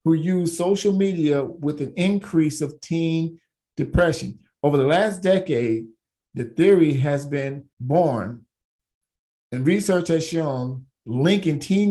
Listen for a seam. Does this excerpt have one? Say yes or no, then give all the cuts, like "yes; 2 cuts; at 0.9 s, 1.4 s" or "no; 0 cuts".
yes; 1 cut; at 7.7 s